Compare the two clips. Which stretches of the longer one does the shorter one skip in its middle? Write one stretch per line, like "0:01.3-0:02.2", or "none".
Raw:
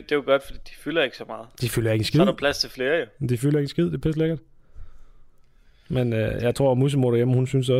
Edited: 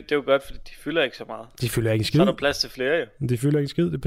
none